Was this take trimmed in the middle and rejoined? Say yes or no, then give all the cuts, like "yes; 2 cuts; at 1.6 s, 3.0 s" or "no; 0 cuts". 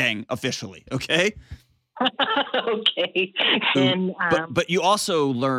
yes; 1 cut; at 3.7 s